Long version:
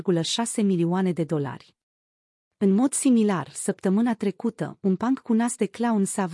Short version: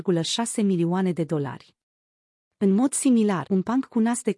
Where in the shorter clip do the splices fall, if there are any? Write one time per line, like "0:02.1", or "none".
0:03.5